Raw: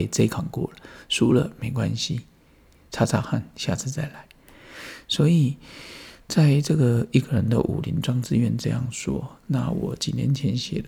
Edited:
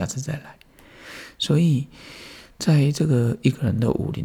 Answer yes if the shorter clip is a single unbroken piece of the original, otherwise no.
yes